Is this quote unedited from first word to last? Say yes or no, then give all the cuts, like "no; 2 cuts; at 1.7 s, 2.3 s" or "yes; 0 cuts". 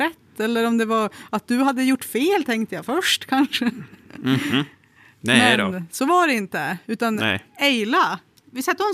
yes; 0 cuts